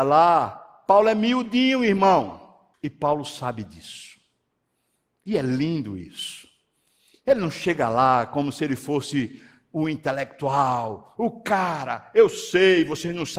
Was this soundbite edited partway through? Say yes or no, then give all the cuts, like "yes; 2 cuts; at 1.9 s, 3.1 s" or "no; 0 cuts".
yes; 1 cut; at 2.7 s